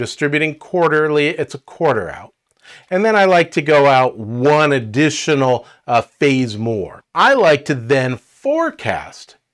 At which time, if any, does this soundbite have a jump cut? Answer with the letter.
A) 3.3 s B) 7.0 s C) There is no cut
B